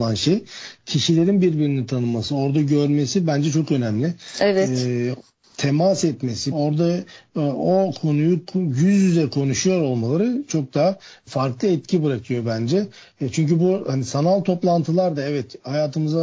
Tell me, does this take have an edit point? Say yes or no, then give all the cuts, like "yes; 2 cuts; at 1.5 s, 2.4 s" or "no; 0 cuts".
yes; 1 cut; at 6.5 s